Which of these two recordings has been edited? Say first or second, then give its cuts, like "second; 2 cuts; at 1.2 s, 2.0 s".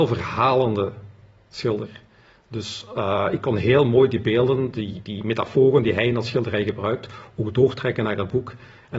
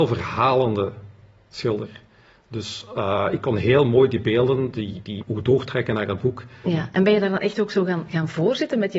second; 2 cuts; at 5.2 s, 6.7 s